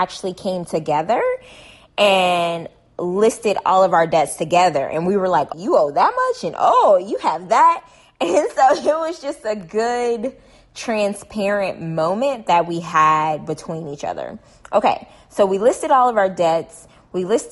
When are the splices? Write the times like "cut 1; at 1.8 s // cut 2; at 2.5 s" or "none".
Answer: cut 1; at 5.5 s